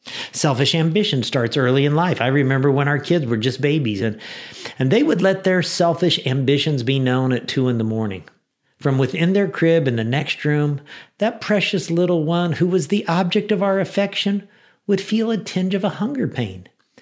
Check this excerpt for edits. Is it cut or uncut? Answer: uncut